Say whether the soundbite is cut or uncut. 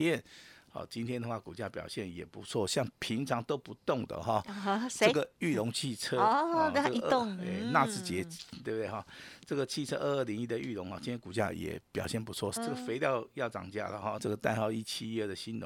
cut